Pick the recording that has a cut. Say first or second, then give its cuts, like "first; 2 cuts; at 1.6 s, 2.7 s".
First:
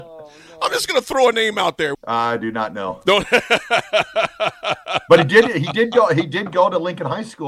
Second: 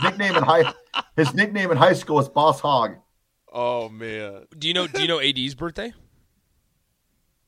first; 1 cut; at 1.9 s